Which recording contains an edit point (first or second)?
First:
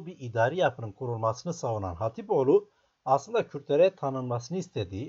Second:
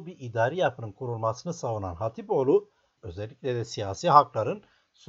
second